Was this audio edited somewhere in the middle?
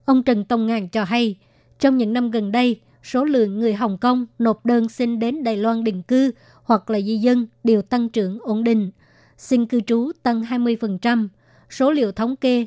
no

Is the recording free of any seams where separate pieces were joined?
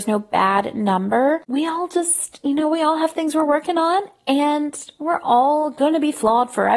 yes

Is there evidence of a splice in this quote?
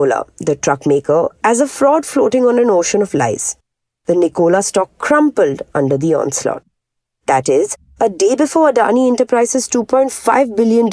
yes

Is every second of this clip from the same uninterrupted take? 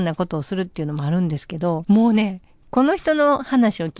no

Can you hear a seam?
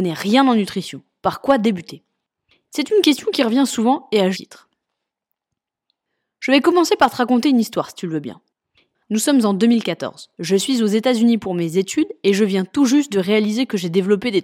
yes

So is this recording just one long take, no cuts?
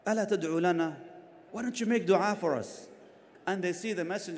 no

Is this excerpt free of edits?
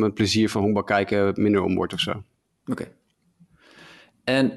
yes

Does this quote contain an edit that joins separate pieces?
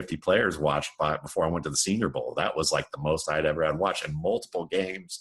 no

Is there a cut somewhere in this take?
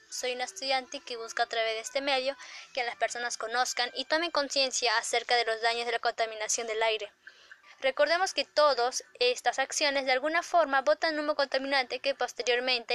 yes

